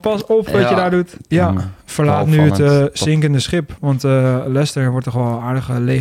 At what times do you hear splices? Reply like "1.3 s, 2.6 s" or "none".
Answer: 1.3 s